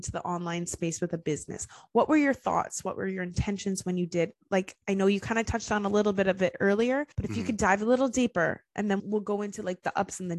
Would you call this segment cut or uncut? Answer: cut